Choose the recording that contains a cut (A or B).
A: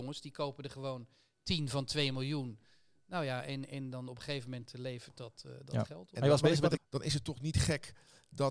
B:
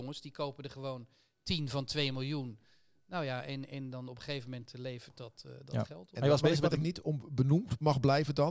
A